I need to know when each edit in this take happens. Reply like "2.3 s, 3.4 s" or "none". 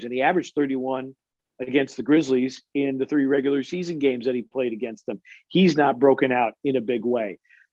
none